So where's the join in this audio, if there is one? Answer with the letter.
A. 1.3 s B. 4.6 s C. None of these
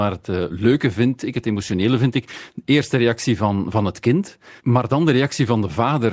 B